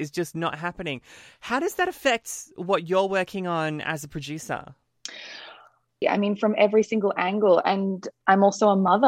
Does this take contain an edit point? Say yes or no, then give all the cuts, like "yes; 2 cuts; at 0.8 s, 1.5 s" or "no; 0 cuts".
yes; 1 cut; at 6.0 s